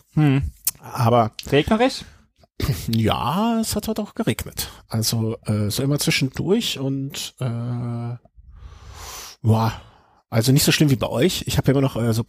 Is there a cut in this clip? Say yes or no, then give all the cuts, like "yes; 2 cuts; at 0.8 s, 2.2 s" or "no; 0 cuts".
no; 0 cuts